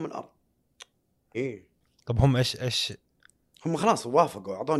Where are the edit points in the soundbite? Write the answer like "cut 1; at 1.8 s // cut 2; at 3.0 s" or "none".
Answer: cut 1; at 1.3 s